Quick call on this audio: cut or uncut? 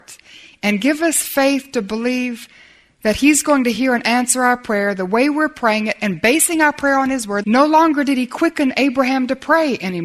cut